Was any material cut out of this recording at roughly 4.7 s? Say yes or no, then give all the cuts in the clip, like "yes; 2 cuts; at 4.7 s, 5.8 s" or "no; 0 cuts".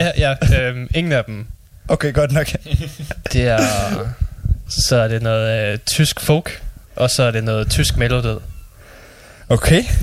yes; 2 cuts; at 4.7 s, 6.8 s